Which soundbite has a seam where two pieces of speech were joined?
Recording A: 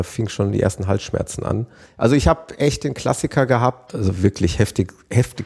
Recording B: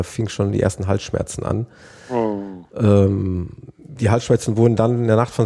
A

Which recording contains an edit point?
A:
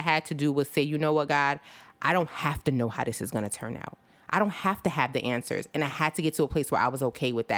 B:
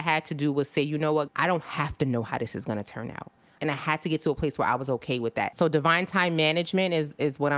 B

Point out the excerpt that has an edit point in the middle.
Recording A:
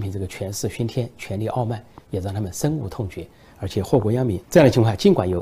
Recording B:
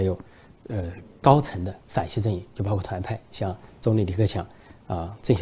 A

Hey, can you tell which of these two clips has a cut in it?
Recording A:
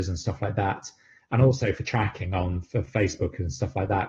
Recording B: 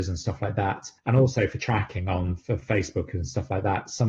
B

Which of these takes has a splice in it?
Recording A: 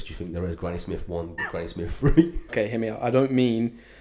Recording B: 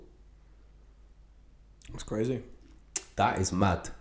A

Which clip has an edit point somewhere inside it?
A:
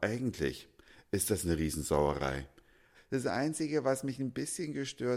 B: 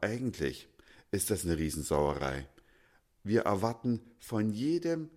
A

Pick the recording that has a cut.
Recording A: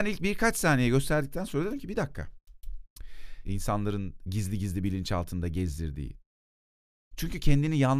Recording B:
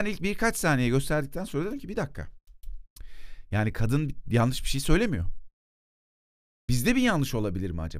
A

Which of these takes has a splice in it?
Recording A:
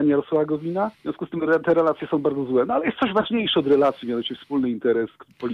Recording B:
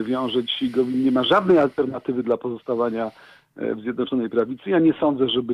A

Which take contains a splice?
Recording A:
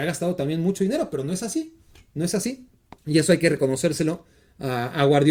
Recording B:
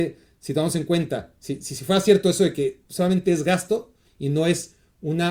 A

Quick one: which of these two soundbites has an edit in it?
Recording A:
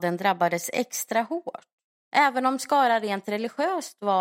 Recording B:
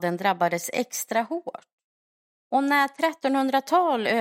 A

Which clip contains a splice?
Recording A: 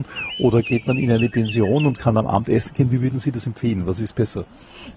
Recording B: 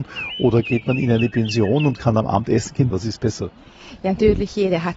B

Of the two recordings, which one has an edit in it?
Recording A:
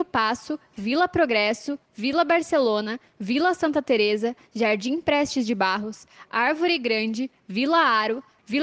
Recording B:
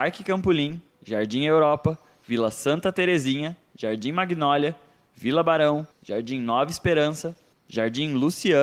B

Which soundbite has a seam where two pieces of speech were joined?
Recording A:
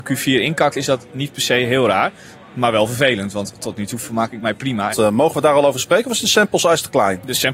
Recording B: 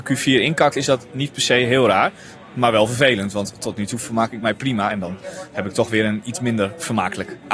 A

